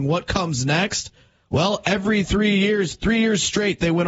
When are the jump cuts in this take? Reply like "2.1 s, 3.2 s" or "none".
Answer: none